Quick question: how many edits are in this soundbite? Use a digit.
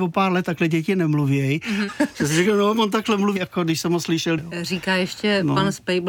3